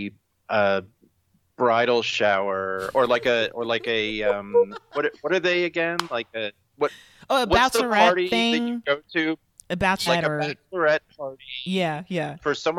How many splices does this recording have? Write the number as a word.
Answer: one